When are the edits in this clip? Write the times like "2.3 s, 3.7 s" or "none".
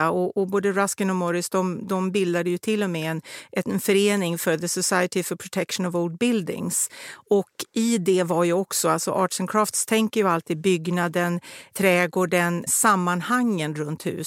12.7 s

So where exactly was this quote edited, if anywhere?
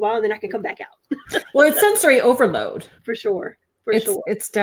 3.0 s

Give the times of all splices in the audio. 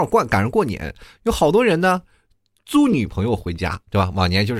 none

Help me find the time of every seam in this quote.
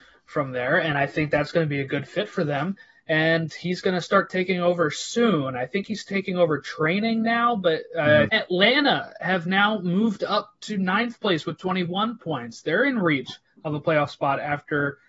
8.3 s

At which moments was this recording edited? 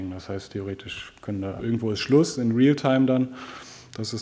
1.6 s

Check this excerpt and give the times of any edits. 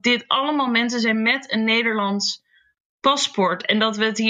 none

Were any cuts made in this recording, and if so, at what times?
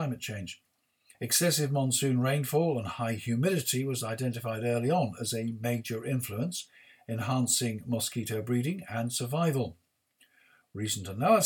1.1 s

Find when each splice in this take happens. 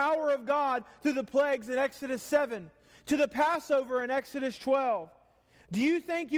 none

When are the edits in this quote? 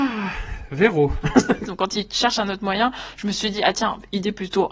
1.7 s

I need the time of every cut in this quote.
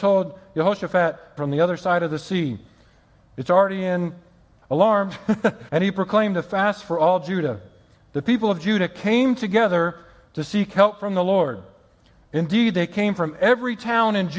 1.4 s, 4.6 s, 5.7 s

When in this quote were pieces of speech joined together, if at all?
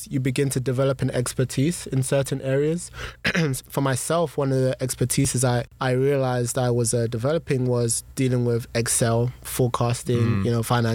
3.6 s

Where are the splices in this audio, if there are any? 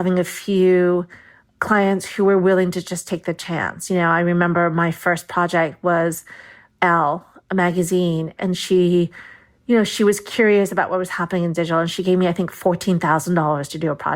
8.4 s

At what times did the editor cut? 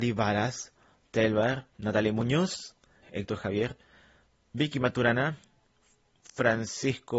1.7 s, 3.0 s

